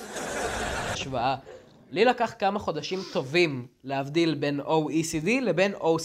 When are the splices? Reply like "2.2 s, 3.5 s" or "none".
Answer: 0.9 s